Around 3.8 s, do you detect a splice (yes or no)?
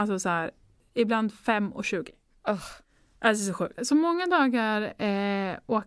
yes